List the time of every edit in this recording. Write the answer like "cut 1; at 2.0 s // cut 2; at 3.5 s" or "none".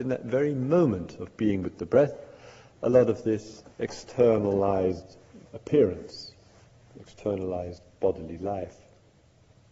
cut 1; at 3.7 s // cut 2; at 5.5 s